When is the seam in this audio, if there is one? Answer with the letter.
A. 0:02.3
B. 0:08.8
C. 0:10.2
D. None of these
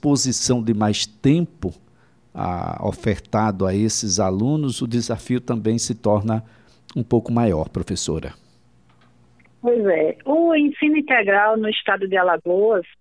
D